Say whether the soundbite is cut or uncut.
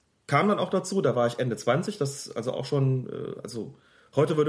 uncut